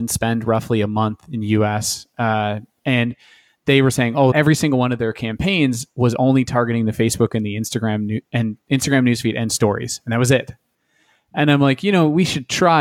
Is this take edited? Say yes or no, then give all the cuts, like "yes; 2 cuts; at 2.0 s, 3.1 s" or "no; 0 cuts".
yes; 1 cut; at 4.3 s